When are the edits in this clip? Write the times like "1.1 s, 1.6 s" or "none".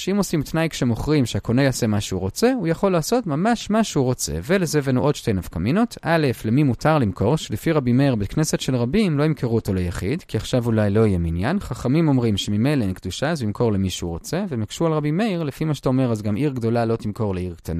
10.3 s